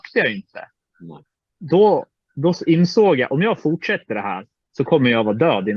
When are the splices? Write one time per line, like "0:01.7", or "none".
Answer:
none